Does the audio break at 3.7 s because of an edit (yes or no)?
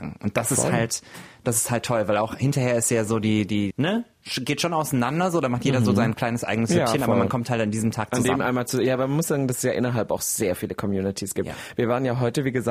yes